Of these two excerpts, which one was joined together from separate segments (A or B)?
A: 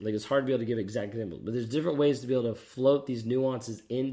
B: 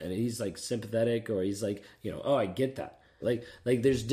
B